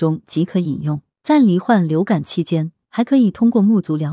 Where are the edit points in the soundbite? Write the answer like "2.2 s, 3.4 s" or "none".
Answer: 1.2 s, 2.8 s

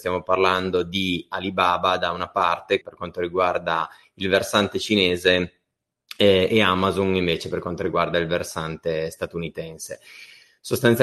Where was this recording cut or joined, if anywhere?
2.8 s

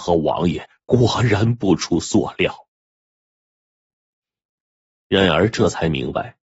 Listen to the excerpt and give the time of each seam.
none

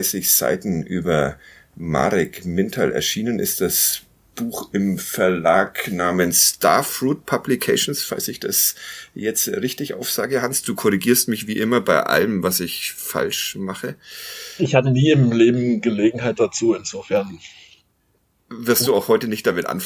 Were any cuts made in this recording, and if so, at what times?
none

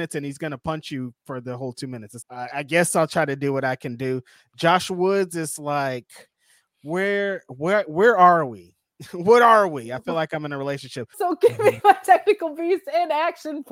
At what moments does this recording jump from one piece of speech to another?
2.2 s, 11.1 s

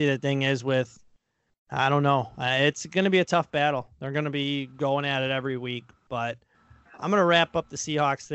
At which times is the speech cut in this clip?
none

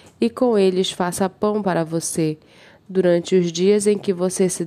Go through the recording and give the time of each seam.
none

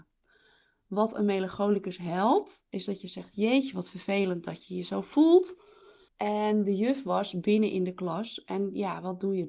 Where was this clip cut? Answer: 6.1 s

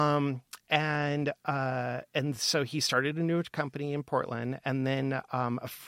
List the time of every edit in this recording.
none

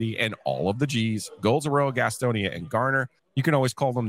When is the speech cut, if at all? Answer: 3.2 s

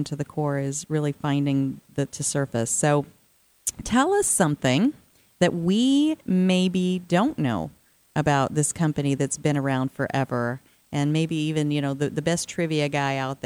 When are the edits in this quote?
2.1 s

